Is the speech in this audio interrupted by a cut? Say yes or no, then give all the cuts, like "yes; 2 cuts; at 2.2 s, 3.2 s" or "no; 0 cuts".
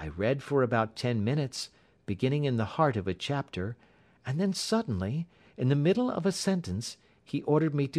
no; 0 cuts